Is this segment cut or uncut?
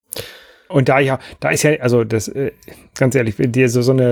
uncut